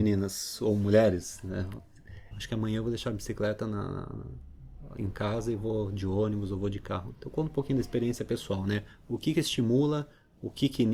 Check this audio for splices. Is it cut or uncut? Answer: cut